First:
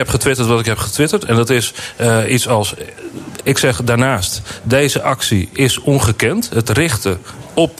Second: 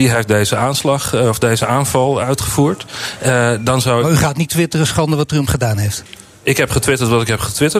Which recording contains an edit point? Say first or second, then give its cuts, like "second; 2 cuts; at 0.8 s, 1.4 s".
first; 1 cut; at 3.4 s